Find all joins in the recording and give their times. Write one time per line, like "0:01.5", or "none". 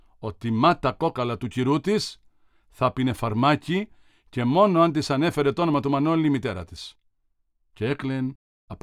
none